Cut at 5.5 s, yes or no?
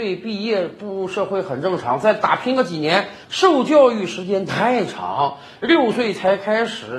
no